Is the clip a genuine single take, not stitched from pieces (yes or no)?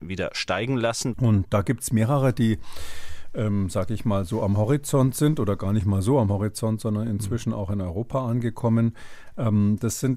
no